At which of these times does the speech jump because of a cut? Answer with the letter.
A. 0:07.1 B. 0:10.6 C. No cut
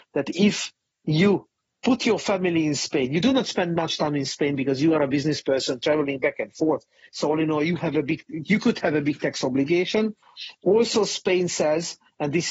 A